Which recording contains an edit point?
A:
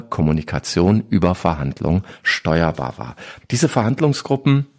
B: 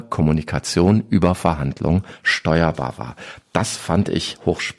A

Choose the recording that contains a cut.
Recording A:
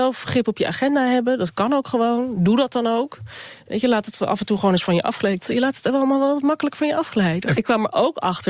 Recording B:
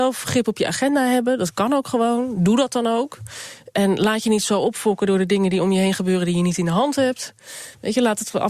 A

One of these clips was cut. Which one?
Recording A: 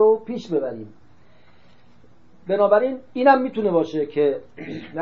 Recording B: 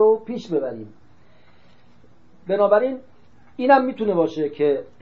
A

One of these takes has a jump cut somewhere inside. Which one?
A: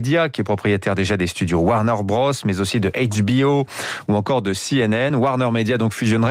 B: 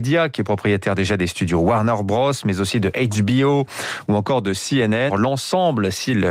B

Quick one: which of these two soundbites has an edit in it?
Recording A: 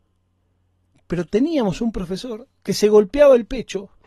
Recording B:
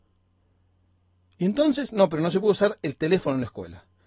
A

